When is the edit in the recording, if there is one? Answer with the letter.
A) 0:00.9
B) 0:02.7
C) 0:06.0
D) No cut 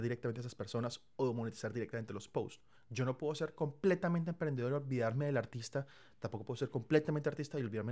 B